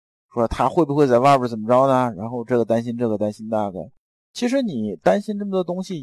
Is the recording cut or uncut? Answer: uncut